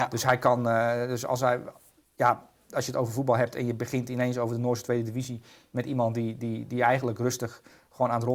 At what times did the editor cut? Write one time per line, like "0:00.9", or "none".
none